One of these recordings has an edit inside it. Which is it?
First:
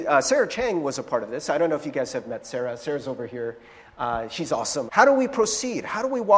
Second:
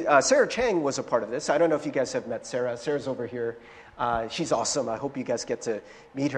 first; 1 cut; at 4.9 s

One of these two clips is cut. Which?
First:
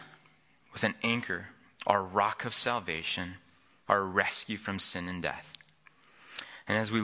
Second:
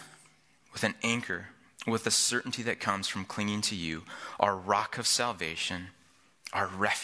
first; 2 cuts; at 1.8 s, 3.9 s

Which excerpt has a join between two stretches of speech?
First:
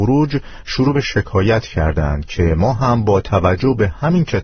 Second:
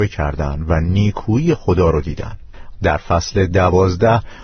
second; 1 cut; at 2.8 s

